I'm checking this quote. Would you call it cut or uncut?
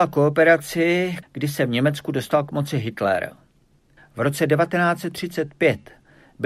cut